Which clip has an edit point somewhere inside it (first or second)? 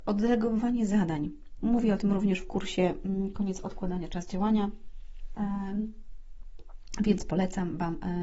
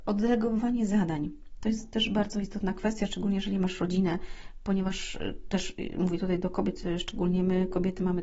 first